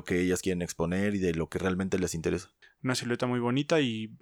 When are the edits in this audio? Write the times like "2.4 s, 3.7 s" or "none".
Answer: 2.6 s

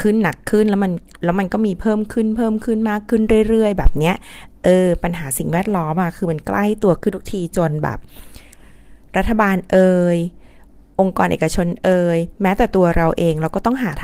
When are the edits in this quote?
none

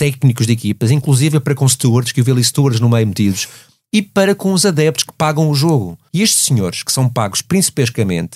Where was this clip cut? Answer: 6.1 s

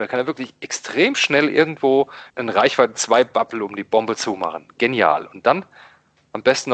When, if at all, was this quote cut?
2.3 s

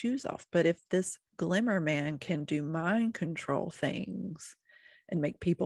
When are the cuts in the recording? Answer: 1.3 s

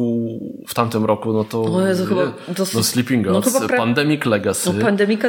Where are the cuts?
none

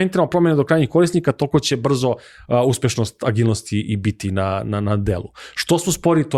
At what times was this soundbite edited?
none

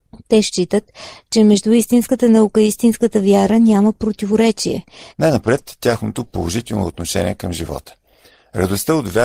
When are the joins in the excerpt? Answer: 5.1 s

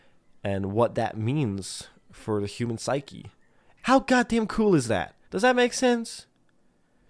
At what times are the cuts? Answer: 3.8 s, 5.2 s

